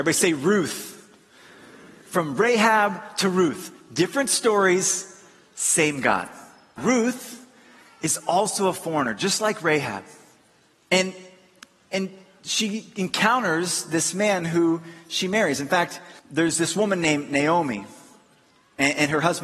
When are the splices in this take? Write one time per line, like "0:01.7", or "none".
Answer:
0:06.8
0:10.7
0:16.2